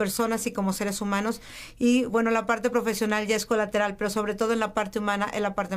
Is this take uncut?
yes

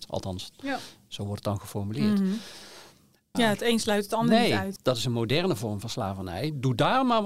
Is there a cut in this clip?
yes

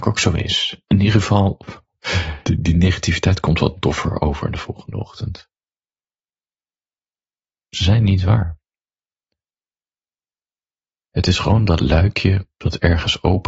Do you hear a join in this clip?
yes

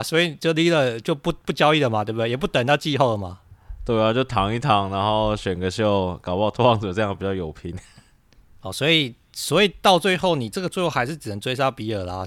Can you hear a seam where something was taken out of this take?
no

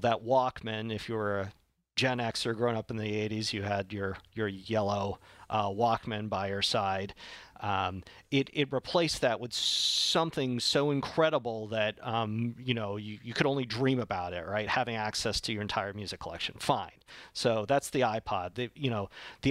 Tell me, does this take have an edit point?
no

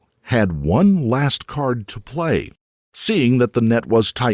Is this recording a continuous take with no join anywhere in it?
yes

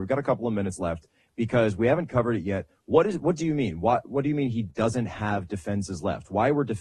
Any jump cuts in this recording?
no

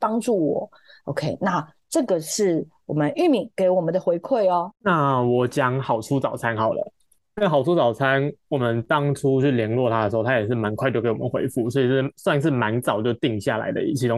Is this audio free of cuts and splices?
no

